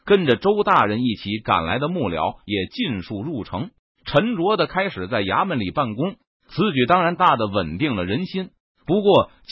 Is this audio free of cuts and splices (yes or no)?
no